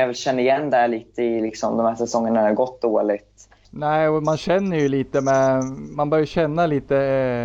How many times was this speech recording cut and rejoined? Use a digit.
1